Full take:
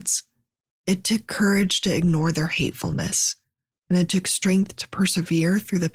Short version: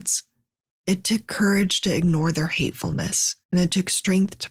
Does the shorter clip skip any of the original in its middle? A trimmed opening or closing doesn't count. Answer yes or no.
yes